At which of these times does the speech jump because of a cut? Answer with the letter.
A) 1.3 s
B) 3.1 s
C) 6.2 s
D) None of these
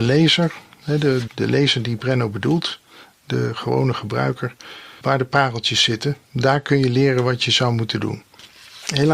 A